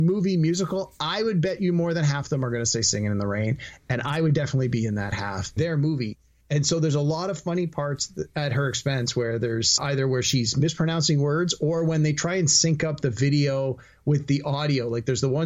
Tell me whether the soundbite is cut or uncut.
cut